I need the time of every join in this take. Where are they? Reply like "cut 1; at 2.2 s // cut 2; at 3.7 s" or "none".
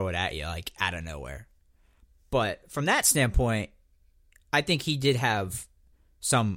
none